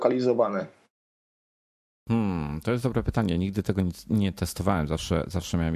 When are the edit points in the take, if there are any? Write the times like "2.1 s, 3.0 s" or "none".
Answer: none